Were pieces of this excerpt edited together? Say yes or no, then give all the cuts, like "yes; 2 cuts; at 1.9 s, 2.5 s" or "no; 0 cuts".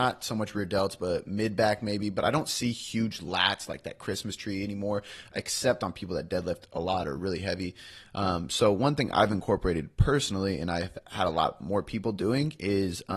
no; 0 cuts